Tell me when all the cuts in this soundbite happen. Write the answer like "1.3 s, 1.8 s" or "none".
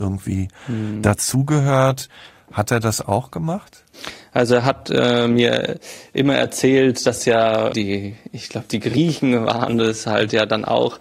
none